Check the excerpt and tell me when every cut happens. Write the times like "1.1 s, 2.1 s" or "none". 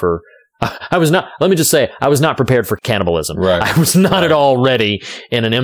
none